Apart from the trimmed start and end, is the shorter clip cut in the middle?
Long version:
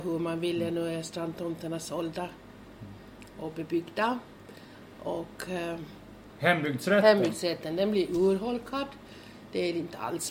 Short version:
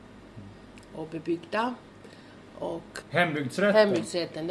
yes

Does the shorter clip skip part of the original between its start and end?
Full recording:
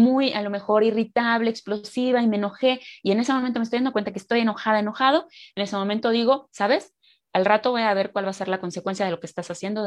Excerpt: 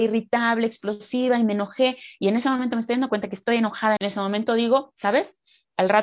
yes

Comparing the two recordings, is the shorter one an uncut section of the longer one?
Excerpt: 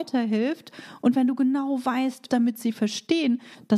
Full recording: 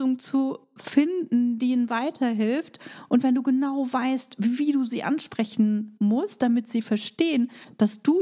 no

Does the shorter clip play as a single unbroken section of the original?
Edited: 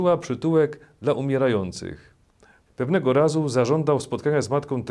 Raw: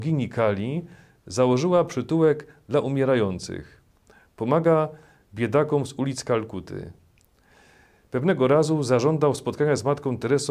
no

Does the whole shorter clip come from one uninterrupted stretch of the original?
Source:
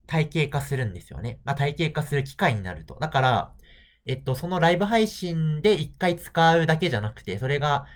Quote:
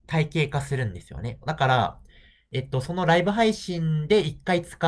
no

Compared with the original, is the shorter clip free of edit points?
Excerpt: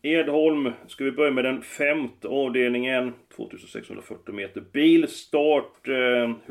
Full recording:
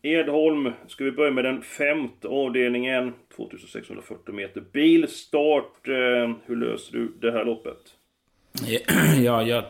yes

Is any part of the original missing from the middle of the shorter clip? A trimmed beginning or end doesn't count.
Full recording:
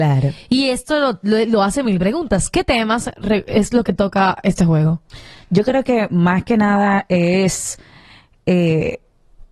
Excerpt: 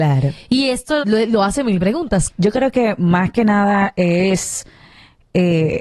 yes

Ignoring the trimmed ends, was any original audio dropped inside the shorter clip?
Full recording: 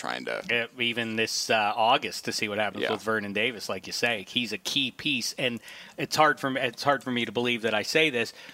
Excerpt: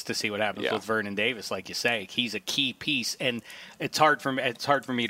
no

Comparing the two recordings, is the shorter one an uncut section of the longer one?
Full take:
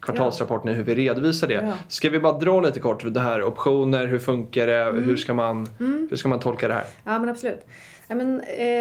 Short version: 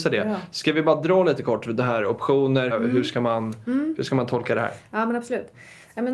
no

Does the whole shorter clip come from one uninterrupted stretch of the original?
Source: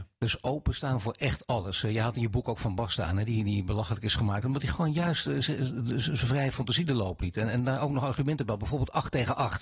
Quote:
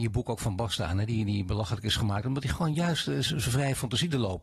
no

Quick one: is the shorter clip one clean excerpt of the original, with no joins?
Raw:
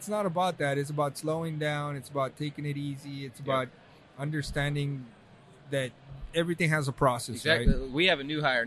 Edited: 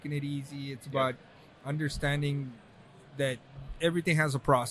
yes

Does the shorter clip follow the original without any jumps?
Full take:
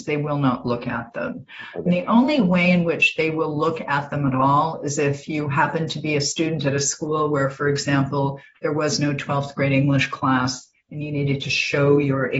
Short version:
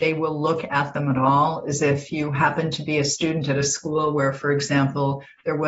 yes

